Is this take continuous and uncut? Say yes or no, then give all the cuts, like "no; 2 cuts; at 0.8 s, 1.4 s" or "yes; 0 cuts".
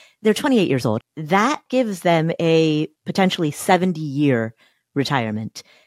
no; 2 cuts; at 1.0 s, 3.0 s